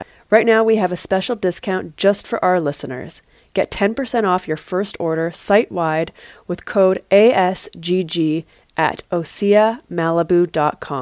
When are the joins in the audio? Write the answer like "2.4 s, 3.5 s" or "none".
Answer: none